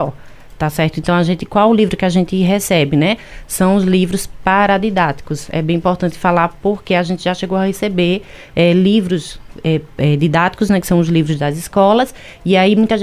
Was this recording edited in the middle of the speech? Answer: no; 0 cuts

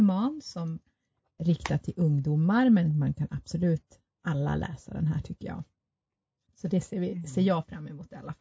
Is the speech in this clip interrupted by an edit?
yes; 2 cuts; at 1.4 s, 6.4 s

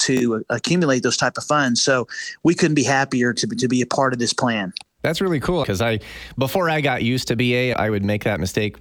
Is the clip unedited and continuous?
no; 2 cuts; at 5.6 s, 7.7 s

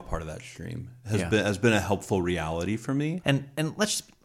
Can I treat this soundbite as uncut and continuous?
no; 1 cut; at 3.2 s

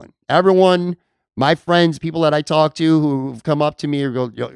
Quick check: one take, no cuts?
yes; 0 cuts

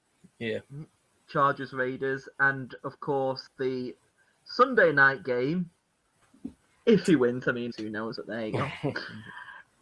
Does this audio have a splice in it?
yes; 2 cuts; at 6.2 s, 7.7 s

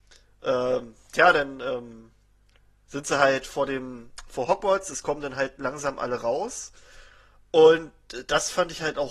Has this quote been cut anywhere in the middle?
no; 0 cuts

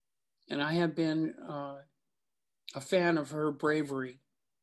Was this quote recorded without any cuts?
yes; 0 cuts

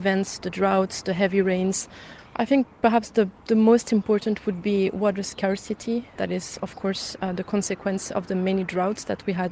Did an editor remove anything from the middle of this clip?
yes; 1 cut; at 6.1 s

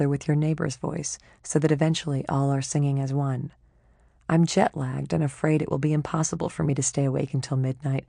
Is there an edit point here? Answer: no; 0 cuts

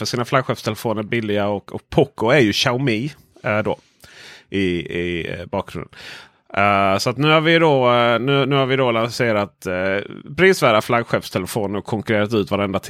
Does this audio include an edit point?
no; 0 cuts

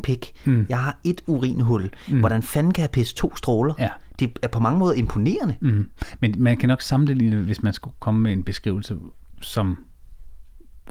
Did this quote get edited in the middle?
no; 0 cuts

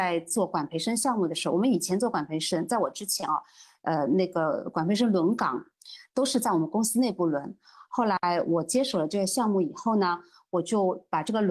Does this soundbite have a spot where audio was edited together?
no; 0 cuts

